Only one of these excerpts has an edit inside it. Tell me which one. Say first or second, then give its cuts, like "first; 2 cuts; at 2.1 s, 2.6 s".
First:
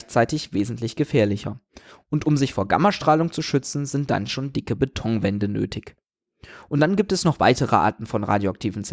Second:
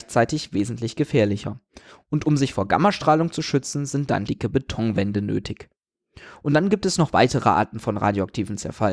second; 1 cut; at 4.3 s